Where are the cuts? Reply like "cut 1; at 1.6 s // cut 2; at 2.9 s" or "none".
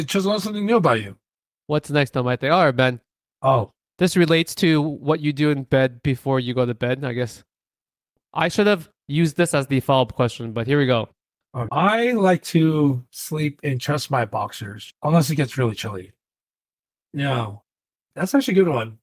cut 1; at 11.7 s // cut 2; at 14.9 s // cut 3; at 17.0 s